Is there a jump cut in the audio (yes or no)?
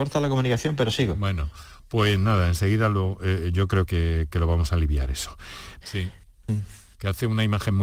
yes